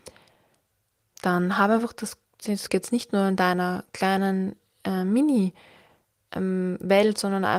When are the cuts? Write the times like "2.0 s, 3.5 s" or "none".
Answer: 2.7 s